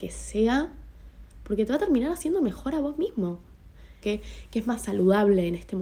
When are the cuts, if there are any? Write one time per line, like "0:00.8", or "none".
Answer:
0:04.0